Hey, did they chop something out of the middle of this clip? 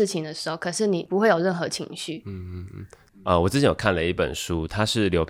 no; 0 cuts

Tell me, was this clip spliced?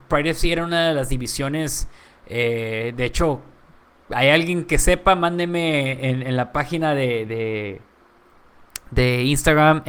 no; 0 cuts

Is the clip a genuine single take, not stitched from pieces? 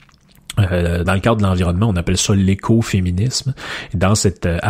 no; 1 cut; at 1.0 s

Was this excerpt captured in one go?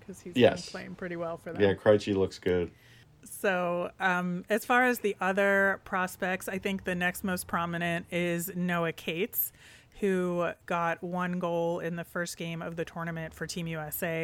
yes; 0 cuts

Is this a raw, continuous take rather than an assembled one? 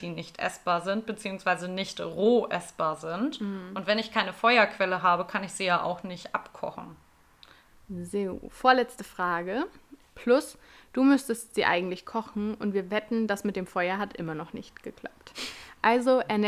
no; 2 cuts; at 7.7 s, 10.0 s

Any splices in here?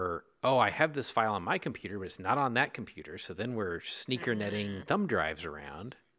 no; 0 cuts

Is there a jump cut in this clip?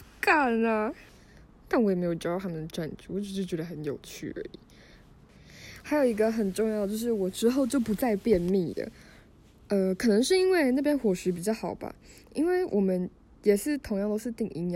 no; 0 cuts

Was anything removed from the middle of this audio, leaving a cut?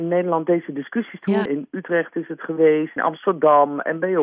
yes; 2 cuts; at 1.5 s, 3.0 s

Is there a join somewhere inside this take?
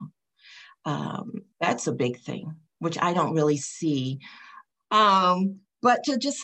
yes; 2 cuts; at 1.5 s, 4.7 s

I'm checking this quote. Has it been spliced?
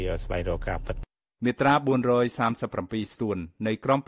no; 0 cuts

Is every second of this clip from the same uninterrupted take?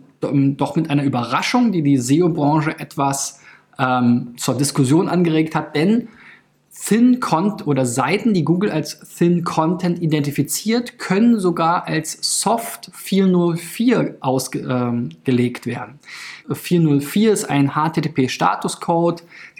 no; 2 cuts; at 4.3 s, 16.4 s

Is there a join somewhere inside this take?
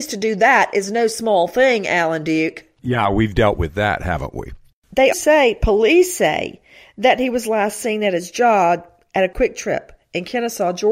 yes; 1 cut; at 5.1 s

